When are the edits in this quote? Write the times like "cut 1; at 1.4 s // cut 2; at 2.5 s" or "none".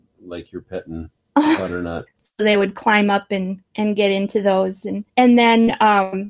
cut 1; at 2.1 s // cut 2; at 5.1 s